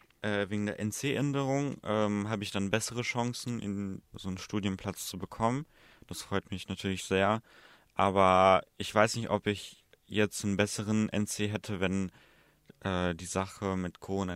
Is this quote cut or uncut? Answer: cut